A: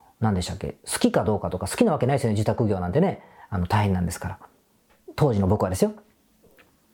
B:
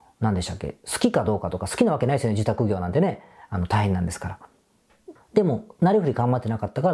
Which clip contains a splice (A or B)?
B